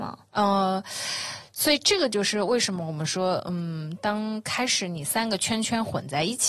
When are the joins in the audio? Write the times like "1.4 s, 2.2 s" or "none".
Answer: none